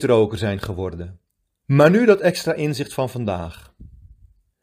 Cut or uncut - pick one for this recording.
cut